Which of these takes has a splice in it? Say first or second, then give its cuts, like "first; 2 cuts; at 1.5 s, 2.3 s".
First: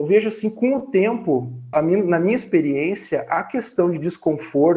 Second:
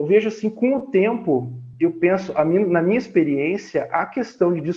first; 1 cut; at 1.7 s